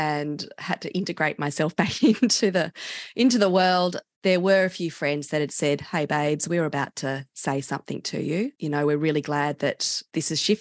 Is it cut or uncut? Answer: uncut